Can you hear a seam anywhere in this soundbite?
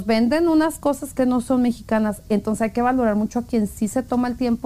yes; 1 cut; at 1.2 s

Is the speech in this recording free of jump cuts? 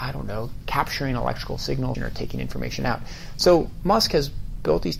no; 1 cut; at 1.9 s

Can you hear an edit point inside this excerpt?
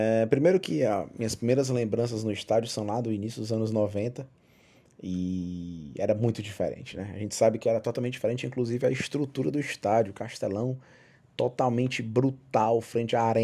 no; 0 cuts

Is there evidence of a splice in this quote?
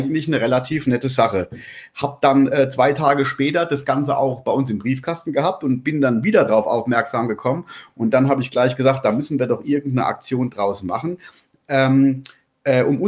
no; 0 cuts

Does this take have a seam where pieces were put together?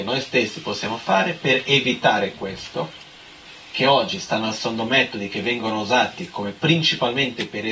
no; 0 cuts

